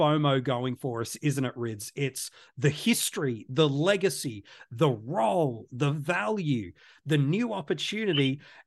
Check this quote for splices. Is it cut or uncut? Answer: uncut